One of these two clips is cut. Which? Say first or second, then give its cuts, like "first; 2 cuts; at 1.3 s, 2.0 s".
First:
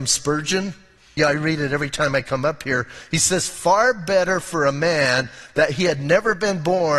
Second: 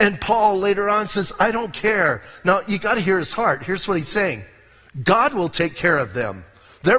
first; 1 cut; at 1.2 s